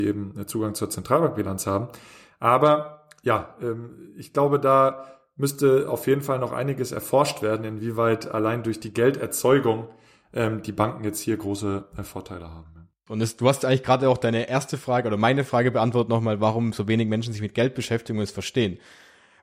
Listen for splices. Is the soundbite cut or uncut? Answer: cut